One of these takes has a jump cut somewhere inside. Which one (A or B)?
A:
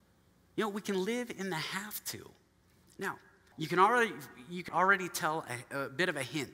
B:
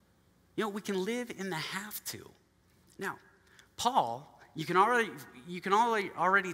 A